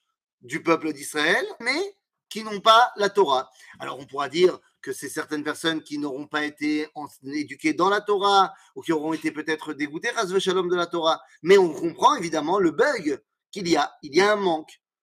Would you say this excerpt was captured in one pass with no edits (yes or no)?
no